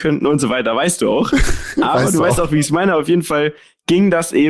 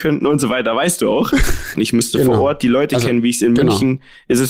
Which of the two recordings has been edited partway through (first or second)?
second